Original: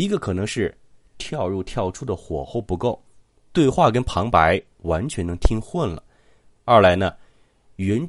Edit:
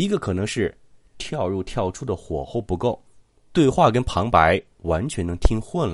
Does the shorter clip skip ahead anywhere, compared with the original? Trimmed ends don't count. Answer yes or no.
no